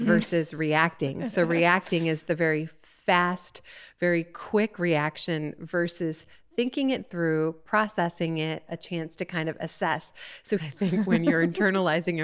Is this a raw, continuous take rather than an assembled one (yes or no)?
no